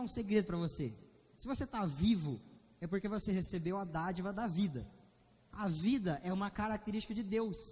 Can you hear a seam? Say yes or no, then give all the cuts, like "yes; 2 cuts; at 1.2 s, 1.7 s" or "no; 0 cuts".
no; 0 cuts